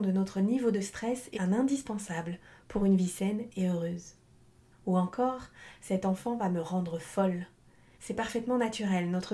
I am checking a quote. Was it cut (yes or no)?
yes